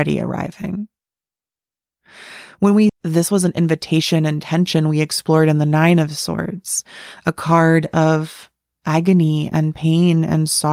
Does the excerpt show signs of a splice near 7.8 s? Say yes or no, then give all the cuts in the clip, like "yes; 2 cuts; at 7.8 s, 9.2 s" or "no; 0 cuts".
no; 1 cut; at 2.9 s